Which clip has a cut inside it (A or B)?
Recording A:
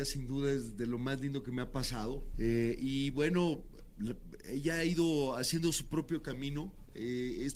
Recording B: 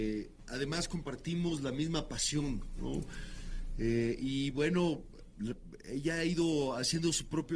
A